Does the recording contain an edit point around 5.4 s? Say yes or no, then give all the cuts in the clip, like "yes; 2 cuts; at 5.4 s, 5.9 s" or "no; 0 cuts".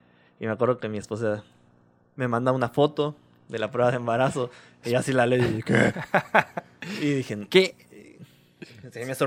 no; 0 cuts